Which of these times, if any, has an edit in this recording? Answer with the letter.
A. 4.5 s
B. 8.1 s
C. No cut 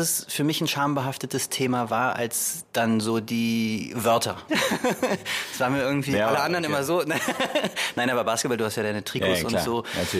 A